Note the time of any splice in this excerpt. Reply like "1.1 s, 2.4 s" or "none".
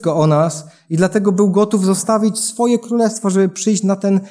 none